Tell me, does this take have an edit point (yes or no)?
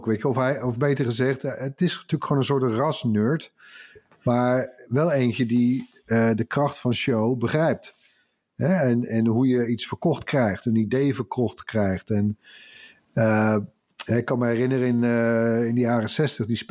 no